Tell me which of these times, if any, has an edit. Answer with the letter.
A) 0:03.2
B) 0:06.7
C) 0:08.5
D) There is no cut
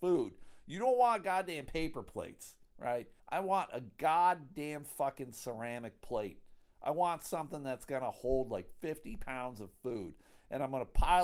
A